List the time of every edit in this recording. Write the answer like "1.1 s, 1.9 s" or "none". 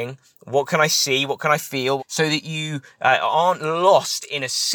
2.0 s